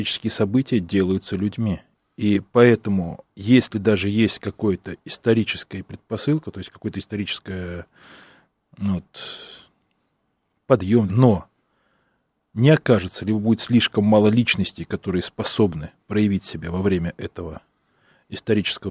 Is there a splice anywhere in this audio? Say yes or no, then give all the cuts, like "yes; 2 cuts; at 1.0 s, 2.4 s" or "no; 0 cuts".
yes; 1 cut; at 11.1 s